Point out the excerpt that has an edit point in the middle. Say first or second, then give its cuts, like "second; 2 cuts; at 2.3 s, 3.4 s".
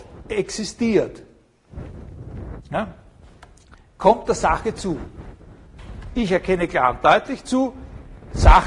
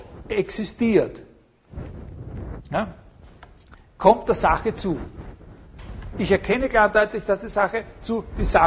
second; 1 cut; at 6.1 s